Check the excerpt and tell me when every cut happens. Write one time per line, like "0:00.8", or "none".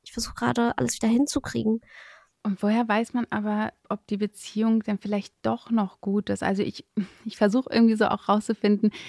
0:02.3
0:03.8

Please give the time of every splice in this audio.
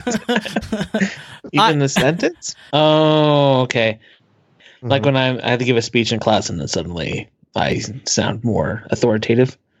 0:02.7

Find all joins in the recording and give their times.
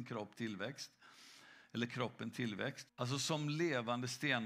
0:02.9

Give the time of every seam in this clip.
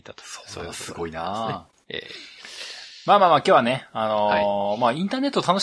none

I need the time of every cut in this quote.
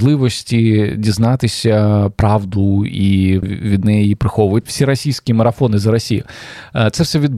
0:03.4
0:04.7

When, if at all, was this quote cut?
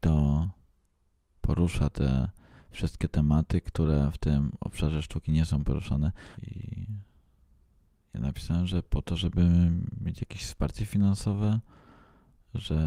0:06.3

